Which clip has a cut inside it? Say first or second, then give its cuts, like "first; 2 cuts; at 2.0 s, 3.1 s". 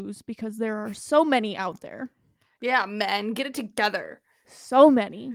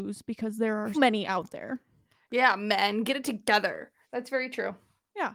second; 2 cuts; at 0.9 s, 4.0 s